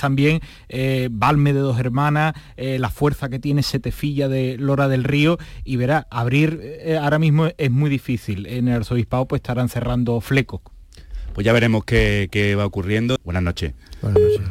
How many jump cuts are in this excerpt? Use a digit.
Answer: 1